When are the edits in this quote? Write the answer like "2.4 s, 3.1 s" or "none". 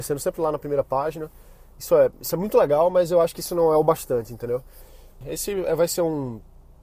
5.2 s